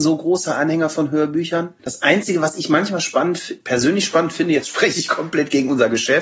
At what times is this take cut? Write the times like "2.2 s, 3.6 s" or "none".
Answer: 1.8 s